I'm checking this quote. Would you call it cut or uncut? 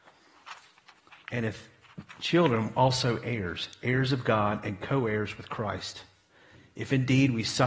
uncut